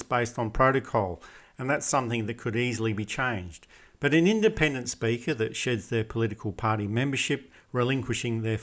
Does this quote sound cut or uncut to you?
uncut